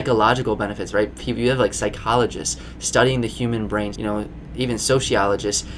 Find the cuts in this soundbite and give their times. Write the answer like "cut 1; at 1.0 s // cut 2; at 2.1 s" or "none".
cut 1; at 3.9 s